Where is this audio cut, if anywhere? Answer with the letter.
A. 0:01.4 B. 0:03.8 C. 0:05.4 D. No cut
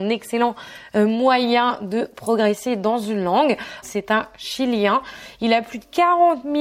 B